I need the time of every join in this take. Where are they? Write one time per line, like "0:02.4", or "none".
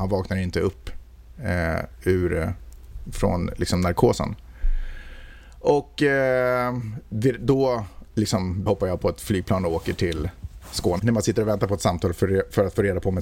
0:08.7
0:11.0